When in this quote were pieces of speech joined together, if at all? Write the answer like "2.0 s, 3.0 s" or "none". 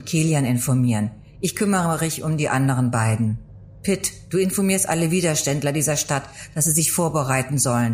none